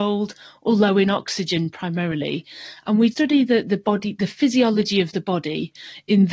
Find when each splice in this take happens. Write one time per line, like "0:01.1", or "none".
0:03.1